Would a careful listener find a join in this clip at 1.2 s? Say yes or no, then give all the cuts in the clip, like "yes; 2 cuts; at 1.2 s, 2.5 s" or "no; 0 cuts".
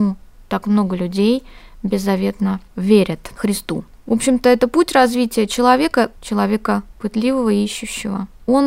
no; 2 cuts; at 3.9 s, 6.1 s